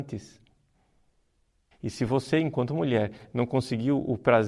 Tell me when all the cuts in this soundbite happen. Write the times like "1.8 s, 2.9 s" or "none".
1.7 s